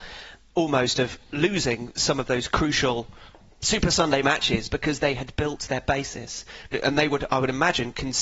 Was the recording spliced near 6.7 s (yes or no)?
yes